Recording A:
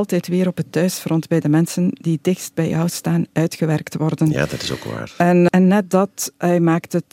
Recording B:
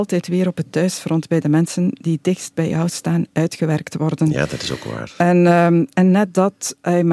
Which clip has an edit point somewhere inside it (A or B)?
A